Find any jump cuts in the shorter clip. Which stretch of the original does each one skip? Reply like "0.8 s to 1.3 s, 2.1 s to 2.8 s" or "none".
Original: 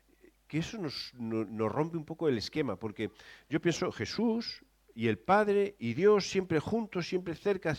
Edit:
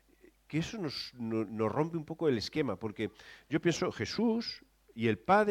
none